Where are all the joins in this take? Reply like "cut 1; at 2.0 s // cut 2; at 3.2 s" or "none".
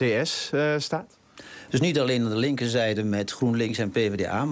cut 1; at 1.7 s